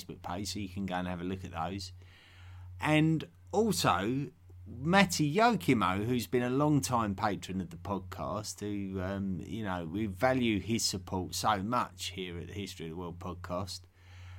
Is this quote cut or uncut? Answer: uncut